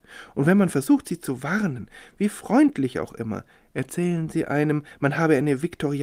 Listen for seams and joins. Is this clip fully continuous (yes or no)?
yes